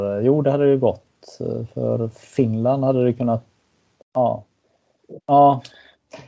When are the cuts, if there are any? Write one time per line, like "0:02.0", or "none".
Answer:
0:04.0
0:05.2

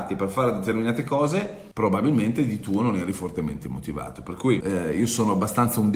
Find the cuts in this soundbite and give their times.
0:01.7
0:04.6

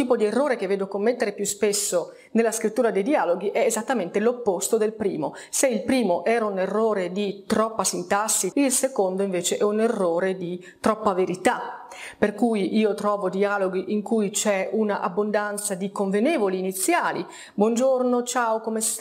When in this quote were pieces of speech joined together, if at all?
0:08.5

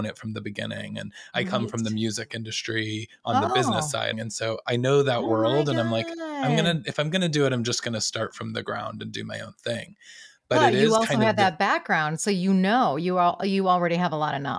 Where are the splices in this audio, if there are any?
0:04.1

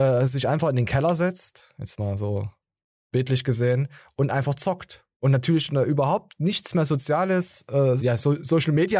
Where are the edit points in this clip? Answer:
0:05.1
0:08.0

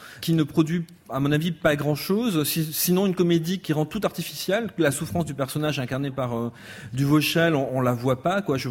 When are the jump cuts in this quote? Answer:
none

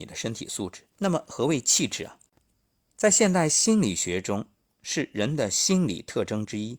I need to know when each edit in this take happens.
0:00.9

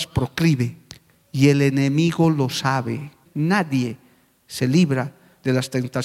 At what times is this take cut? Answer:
0:03.3

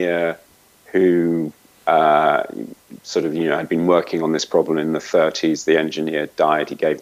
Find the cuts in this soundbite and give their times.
none

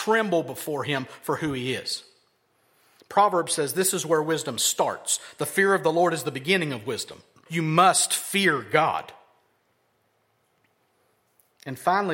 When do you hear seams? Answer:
0:07.5

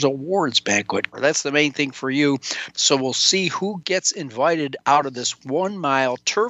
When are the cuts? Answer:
0:01.1
0:02.7

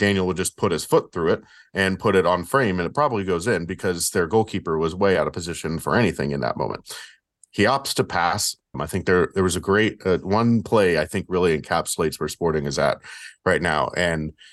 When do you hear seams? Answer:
0:08.7

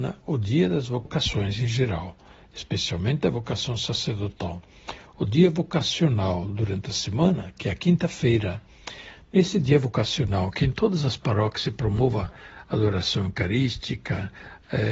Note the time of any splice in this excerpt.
none

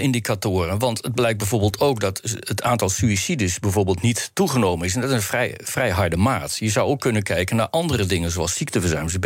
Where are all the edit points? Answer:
none

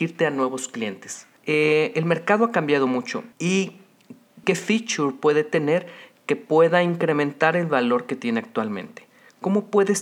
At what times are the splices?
0:01.4
0:03.3
0:04.4

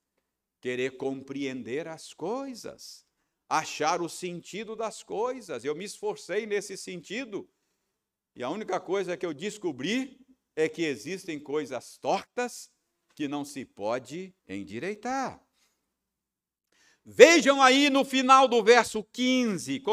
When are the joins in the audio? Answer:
0:14.4

